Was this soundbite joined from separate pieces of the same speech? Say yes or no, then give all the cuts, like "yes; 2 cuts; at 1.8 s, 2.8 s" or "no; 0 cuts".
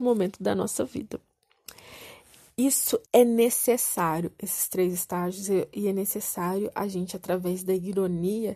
yes; 1 cut; at 3.0 s